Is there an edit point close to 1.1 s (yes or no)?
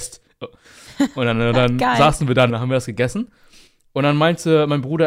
no